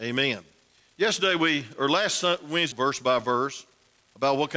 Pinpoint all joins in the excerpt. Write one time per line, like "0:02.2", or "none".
0:02.7